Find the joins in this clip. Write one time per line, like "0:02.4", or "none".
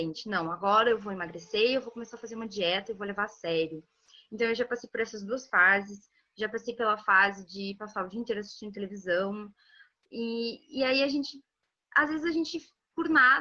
none